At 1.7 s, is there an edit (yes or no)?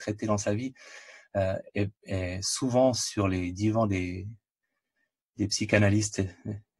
no